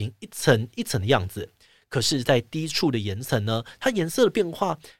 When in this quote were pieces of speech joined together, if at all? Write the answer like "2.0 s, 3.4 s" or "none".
none